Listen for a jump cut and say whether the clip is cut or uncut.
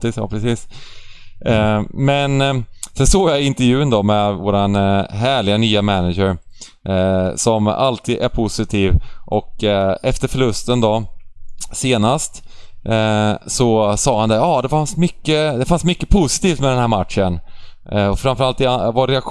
uncut